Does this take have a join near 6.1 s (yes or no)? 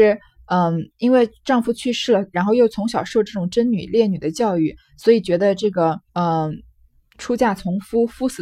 yes